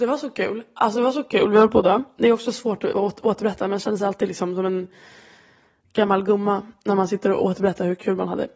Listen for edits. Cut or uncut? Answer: uncut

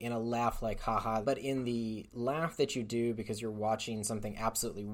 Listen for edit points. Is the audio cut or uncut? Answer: cut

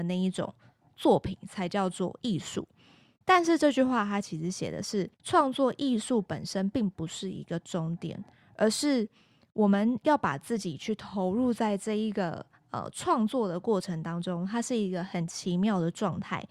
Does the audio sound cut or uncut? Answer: cut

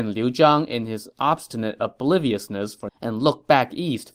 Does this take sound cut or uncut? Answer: cut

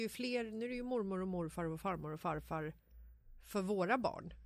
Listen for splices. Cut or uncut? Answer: uncut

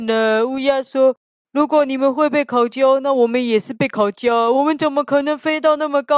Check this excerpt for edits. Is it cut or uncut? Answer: uncut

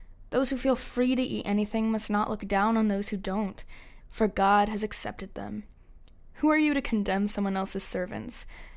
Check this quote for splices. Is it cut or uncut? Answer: cut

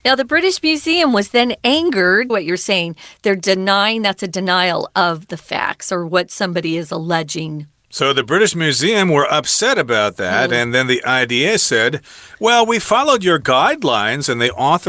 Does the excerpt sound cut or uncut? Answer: cut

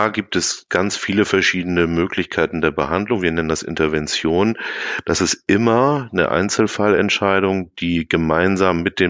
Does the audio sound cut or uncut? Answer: uncut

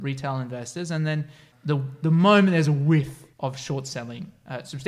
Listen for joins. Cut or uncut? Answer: cut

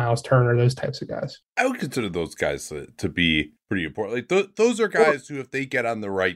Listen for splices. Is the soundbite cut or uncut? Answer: uncut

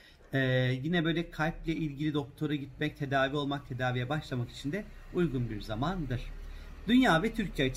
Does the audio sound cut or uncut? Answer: uncut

